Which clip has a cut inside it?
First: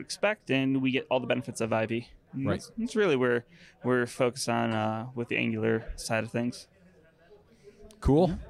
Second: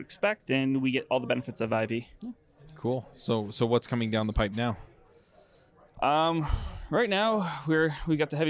second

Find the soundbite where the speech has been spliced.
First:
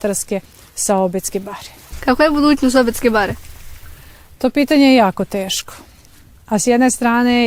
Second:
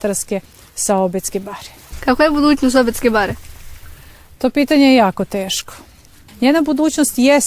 second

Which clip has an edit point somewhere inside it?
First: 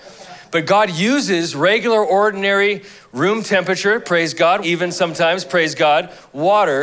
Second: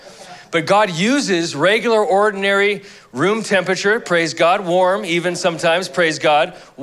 first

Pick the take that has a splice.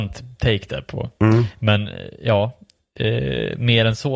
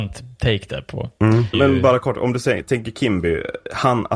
second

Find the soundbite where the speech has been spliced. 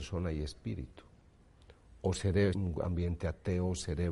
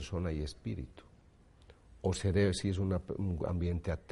first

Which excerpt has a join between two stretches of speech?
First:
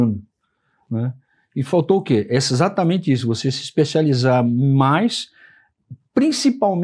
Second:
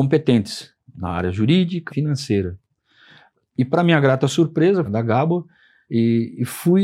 second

